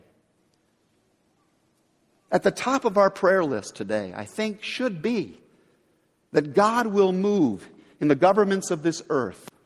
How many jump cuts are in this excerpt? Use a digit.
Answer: 0